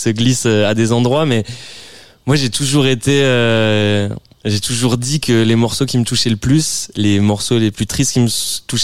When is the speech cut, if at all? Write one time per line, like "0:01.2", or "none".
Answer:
none